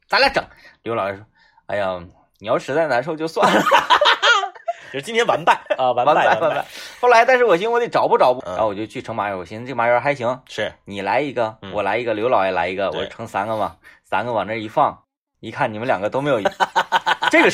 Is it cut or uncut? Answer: cut